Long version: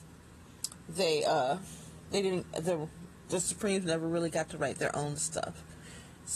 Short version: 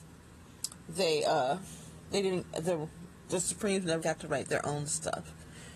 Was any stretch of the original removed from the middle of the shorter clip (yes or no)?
yes